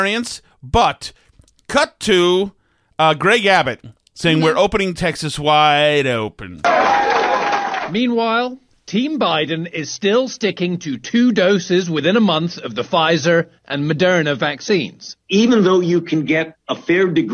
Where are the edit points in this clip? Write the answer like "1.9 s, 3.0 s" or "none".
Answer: none

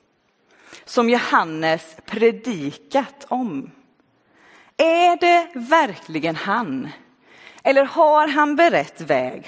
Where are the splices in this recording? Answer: none

